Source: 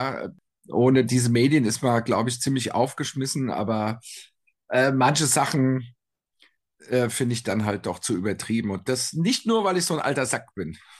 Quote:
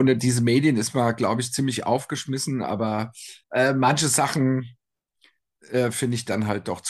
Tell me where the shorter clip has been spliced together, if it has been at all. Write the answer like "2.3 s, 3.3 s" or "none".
3.4 s